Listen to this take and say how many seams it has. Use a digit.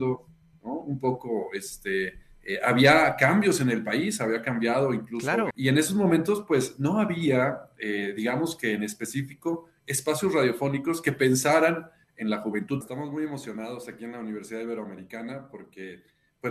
2